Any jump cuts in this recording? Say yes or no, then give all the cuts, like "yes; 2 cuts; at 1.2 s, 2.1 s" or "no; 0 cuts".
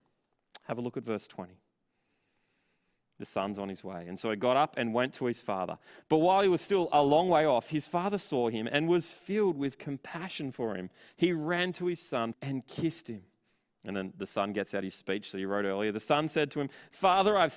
yes; 1 cut; at 12.3 s